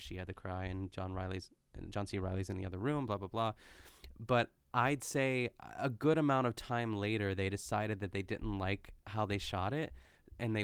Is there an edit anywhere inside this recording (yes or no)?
no